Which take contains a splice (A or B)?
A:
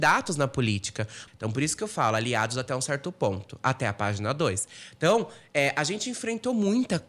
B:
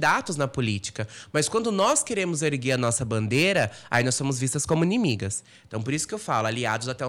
A